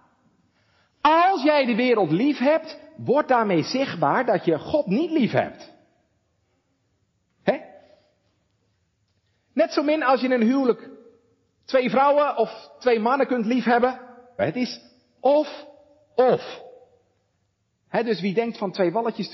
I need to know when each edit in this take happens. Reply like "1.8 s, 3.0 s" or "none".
14.4 s